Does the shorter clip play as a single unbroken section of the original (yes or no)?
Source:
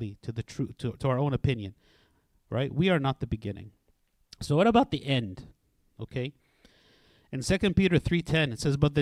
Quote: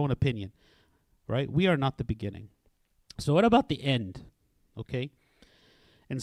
yes